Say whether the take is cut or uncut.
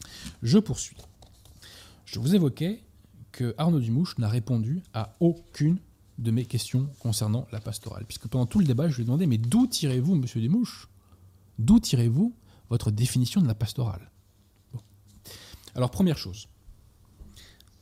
uncut